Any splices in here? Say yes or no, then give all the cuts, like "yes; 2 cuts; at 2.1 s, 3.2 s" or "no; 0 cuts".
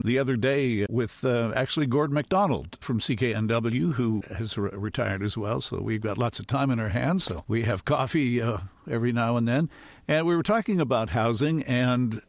no; 0 cuts